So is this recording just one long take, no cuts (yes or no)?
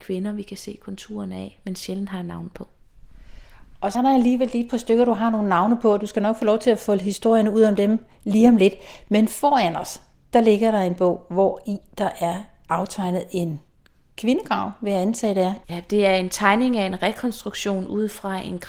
no